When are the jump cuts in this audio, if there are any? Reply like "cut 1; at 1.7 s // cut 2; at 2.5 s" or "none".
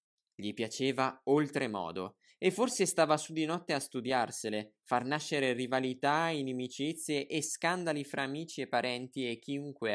none